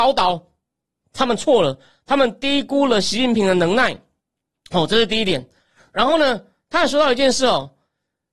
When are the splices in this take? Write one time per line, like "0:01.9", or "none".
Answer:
none